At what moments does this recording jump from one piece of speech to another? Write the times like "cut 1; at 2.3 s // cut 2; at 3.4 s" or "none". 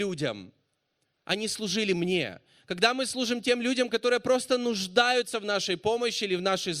none